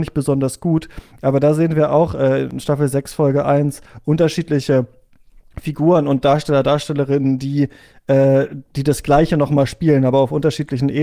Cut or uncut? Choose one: uncut